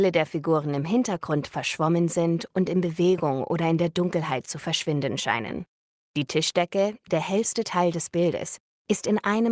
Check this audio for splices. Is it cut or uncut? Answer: cut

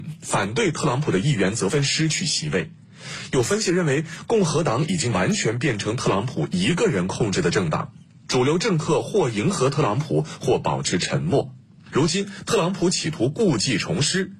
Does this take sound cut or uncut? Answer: cut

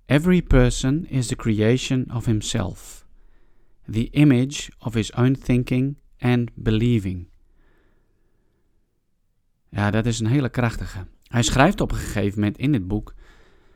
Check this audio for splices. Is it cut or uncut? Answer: cut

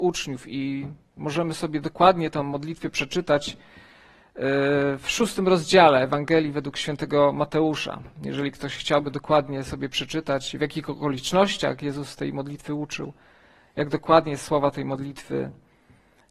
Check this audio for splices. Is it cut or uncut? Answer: uncut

